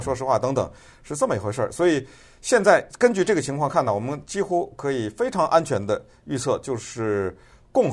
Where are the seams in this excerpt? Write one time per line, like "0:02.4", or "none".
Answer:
none